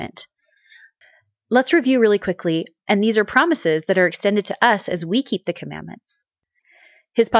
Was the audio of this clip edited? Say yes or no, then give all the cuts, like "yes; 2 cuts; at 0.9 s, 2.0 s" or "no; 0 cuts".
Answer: yes; 1 cut; at 2.8 s